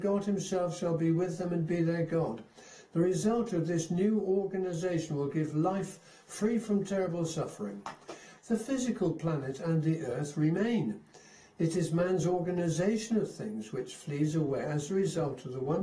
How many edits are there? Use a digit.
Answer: 1